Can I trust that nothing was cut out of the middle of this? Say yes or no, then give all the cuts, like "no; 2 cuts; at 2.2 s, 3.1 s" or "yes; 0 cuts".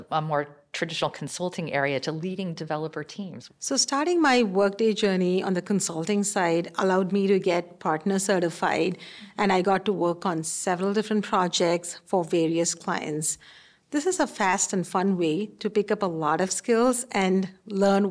no; 1 cut; at 3.5 s